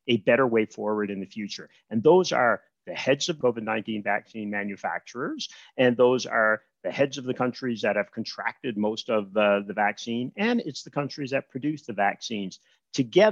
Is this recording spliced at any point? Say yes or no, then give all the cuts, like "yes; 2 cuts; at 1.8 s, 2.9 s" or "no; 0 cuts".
yes; 1 cut; at 3.4 s